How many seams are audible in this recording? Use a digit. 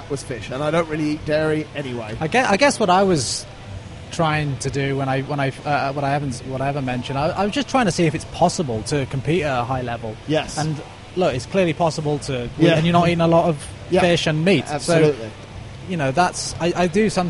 1